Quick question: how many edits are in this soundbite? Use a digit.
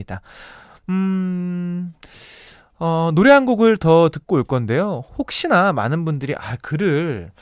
0